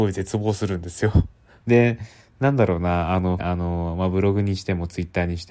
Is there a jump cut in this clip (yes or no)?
yes